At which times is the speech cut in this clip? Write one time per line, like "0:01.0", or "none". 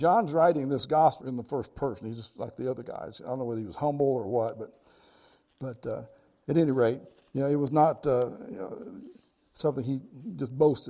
0:01.2